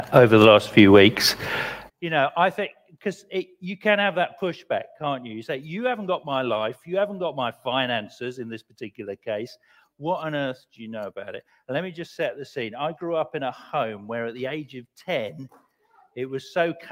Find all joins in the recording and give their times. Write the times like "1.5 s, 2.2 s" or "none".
1.9 s